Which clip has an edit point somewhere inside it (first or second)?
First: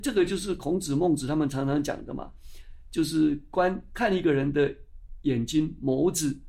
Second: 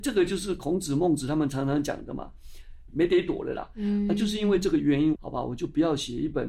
second